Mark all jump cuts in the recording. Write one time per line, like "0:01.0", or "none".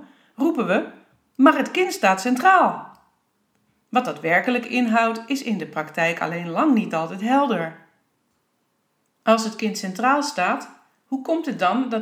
none